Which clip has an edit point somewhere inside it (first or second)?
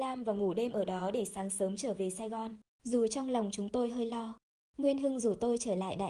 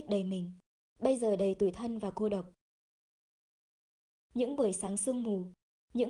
first